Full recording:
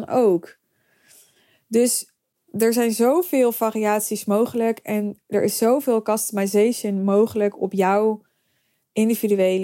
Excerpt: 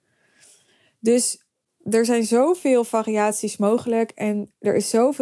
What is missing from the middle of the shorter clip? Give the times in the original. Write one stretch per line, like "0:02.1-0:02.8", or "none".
none